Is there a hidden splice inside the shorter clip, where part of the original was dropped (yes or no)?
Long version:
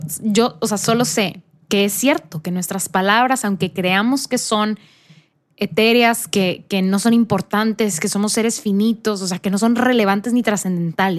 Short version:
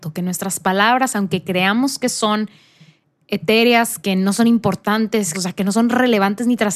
yes